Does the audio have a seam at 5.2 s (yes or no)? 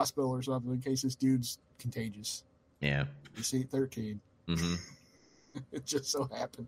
no